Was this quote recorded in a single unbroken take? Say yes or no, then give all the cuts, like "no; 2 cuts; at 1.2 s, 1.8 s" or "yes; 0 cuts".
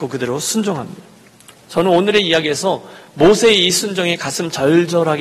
yes; 0 cuts